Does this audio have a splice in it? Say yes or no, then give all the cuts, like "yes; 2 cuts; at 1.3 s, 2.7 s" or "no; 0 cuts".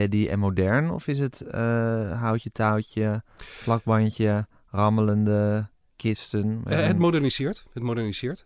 no; 0 cuts